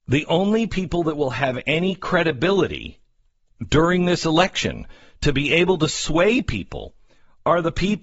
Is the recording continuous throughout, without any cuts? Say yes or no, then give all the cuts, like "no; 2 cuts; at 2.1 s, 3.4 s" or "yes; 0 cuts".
yes; 0 cuts